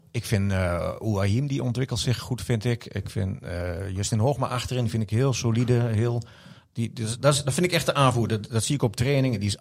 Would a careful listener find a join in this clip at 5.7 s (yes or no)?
no